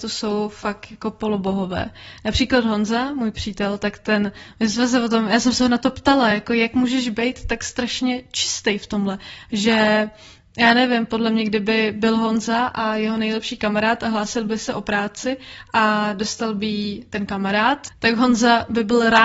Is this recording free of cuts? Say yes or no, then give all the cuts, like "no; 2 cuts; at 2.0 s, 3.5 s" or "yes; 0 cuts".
yes; 0 cuts